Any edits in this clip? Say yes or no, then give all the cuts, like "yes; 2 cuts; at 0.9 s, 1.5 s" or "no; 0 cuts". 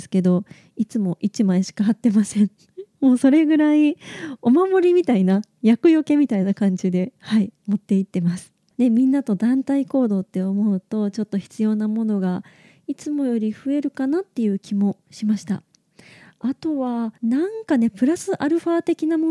yes; 2 cuts; at 8.7 s, 17.2 s